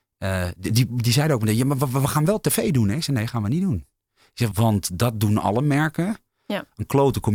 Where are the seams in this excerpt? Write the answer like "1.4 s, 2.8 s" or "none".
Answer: 4.5 s